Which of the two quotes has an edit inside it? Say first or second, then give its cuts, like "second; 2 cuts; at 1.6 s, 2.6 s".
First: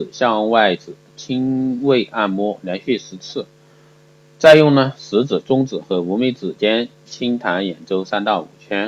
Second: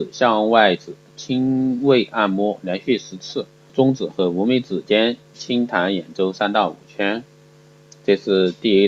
second; 1 cut; at 3.7 s